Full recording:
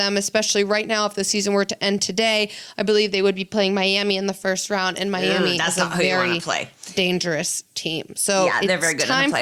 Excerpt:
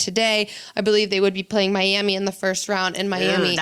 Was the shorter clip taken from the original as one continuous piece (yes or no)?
yes